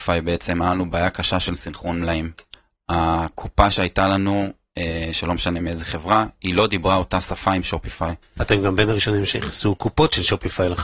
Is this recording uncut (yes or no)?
no